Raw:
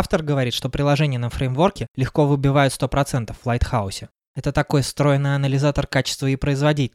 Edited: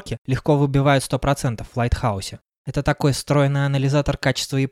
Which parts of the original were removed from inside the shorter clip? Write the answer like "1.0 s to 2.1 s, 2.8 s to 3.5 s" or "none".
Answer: none